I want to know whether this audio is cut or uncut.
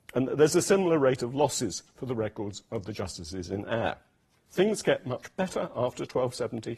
uncut